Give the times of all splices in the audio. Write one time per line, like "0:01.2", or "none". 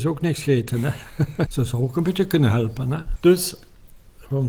0:01.5
0:03.2